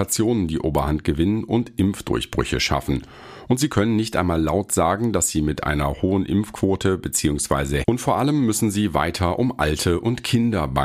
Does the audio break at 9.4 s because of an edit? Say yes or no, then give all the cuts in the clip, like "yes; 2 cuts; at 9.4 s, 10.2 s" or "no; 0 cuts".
no; 1 cut; at 7.8 s